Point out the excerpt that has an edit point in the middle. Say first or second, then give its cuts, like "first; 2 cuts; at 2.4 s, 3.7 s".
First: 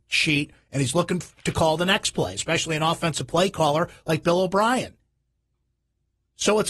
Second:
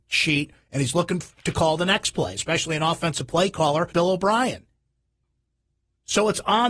second; 1 cut; at 3.9 s